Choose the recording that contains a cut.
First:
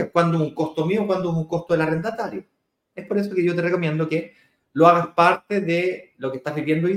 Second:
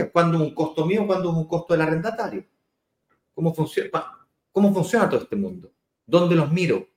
first; 1 cut; at 2.9 s

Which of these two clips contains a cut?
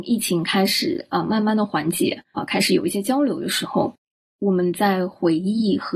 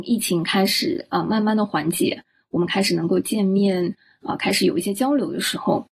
first; 1 cut; at 2.3 s

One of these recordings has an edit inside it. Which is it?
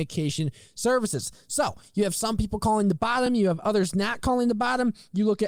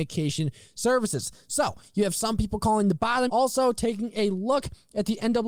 second; 1 cut; at 3.3 s

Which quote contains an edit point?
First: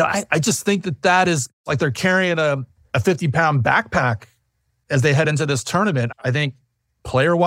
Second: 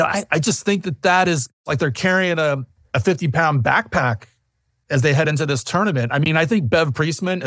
first; 1 cut; at 6.1 s

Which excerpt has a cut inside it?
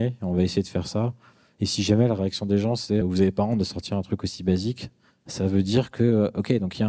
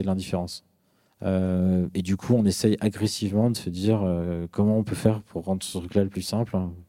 first; 1 cut; at 3.0 s

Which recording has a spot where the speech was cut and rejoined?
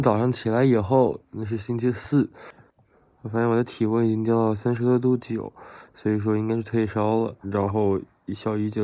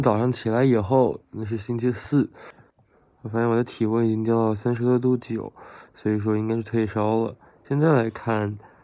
first; 1 cut; at 7.4 s

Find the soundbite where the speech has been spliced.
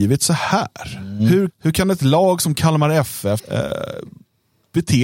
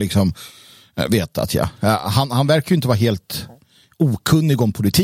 first; 2 cuts; at 1.5 s, 3.4 s

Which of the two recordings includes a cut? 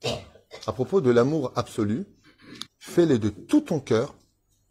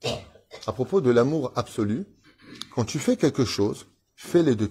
first; 1 cut; at 2.7 s

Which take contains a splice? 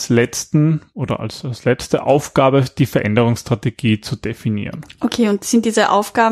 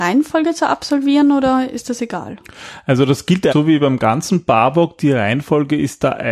second; 1 cut; at 3.5 s

